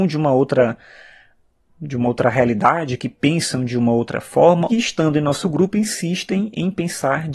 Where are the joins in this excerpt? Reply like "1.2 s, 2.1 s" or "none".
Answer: 4.7 s